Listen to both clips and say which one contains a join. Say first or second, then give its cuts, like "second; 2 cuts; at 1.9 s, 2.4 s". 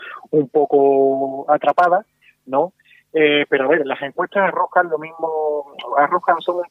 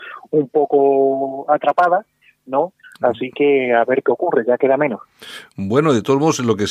second; 1 cut; at 2.8 s